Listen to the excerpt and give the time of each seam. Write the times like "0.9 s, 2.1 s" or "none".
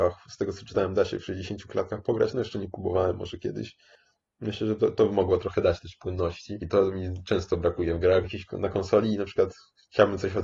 6.6 s, 8.2 s